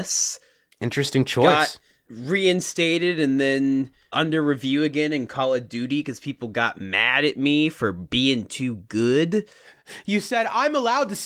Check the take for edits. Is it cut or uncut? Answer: uncut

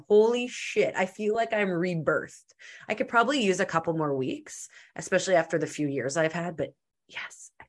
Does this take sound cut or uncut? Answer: uncut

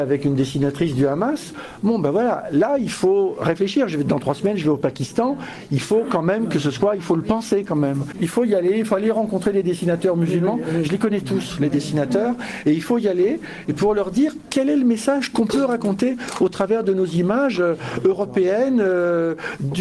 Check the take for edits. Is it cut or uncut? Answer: uncut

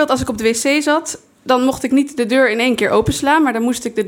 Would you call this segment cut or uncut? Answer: uncut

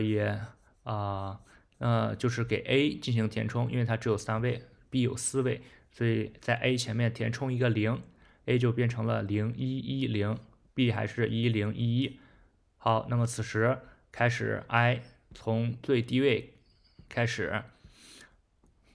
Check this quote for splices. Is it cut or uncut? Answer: cut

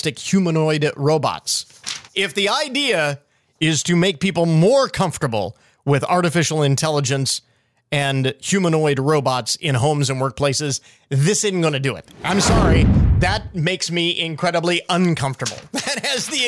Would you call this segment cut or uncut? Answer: cut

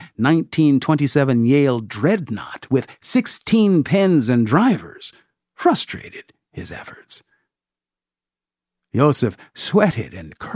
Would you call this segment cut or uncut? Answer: uncut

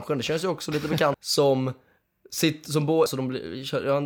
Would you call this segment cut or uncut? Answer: cut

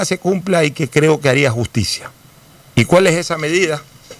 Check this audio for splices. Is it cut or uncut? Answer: uncut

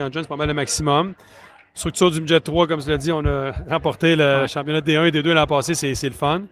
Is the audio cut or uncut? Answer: uncut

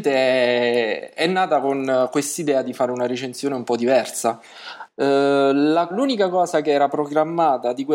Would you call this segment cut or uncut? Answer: cut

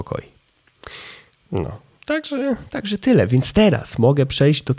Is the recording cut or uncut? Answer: uncut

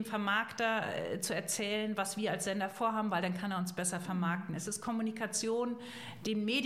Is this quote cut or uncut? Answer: uncut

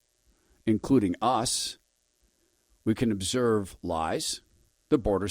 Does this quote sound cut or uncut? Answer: uncut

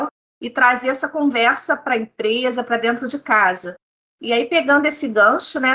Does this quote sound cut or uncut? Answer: uncut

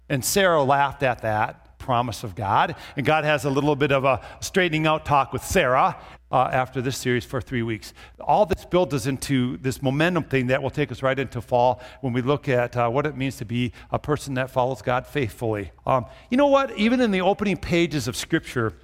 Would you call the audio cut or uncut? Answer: cut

